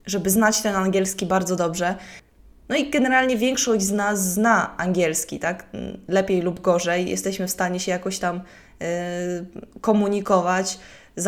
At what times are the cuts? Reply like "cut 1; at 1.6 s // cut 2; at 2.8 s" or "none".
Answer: none